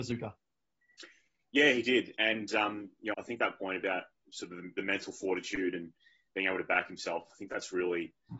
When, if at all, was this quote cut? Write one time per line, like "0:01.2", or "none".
0:03.1